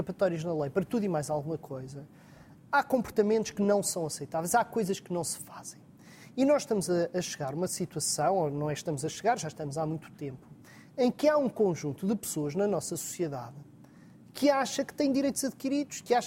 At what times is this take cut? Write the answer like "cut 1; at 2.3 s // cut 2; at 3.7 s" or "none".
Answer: none

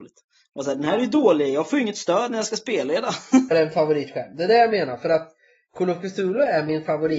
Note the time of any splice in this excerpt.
cut 1; at 3.5 s

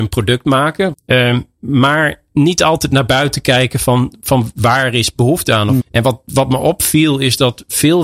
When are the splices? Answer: cut 1; at 0.9 s // cut 2; at 5.8 s

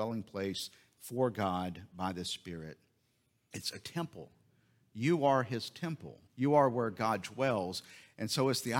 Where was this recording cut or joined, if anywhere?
cut 1; at 3.5 s // cut 2; at 6.3 s

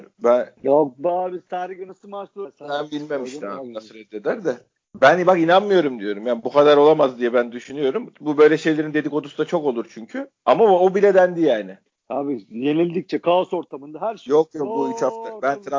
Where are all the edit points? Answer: cut 1; at 10.4 s

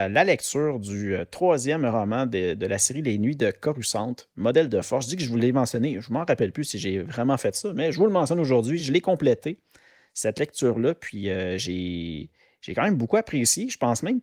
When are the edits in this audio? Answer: none

